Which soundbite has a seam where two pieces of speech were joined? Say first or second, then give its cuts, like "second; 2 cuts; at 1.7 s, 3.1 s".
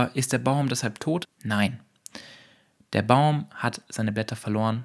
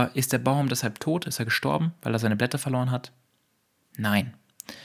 first; 1 cut; at 1.2 s